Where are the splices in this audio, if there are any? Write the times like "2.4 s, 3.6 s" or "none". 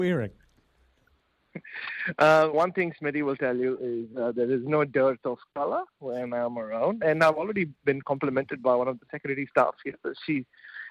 2.5 s

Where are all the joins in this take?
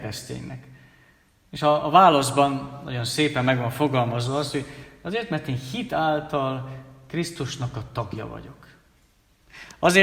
none

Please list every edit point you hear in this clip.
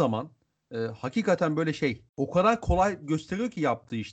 2.1 s

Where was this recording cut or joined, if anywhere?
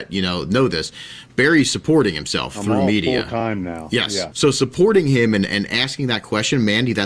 4.3 s

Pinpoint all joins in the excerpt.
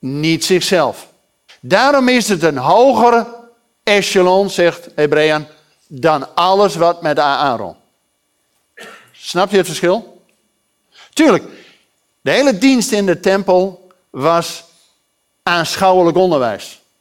1.5 s

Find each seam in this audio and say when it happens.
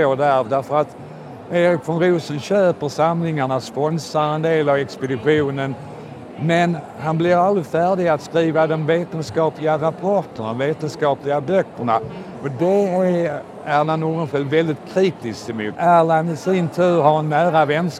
15.7 s

